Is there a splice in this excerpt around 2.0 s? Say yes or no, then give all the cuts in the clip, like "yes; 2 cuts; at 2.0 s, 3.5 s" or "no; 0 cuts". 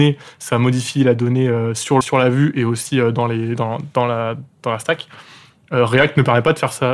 yes; 1 cut; at 2.0 s